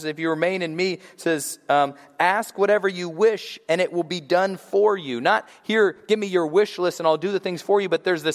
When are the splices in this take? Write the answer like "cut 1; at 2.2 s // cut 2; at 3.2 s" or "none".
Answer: none